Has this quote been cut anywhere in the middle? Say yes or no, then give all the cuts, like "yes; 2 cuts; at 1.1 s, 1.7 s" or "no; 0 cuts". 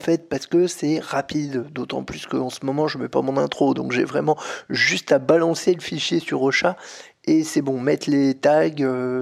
no; 0 cuts